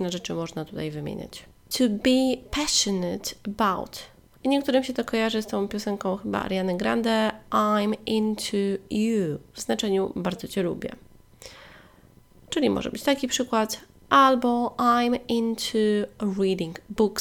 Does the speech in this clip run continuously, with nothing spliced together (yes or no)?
no